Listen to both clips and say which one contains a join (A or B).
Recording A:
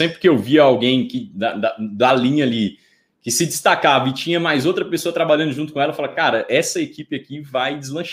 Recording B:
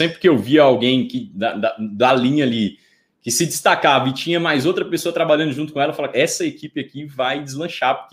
B